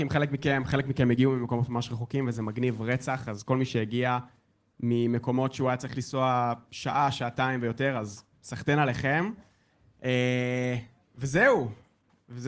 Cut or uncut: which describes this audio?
uncut